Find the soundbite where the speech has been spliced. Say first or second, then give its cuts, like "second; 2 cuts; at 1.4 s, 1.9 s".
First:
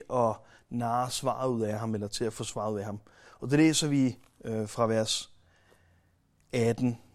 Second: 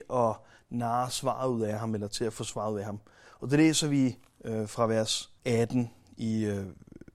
second; 1 cut; at 5.4 s